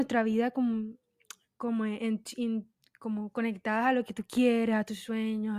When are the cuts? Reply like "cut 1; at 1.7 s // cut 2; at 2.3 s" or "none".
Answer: none

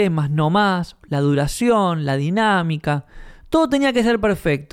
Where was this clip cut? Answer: none

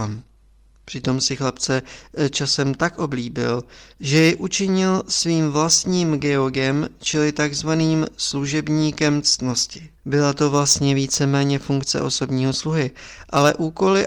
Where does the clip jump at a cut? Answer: cut 1; at 10.0 s

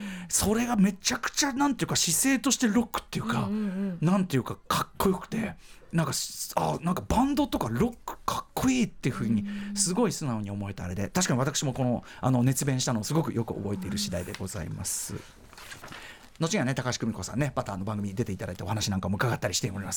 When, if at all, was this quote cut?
none

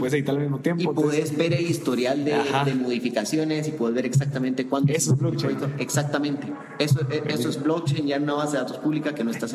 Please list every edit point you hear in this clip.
none

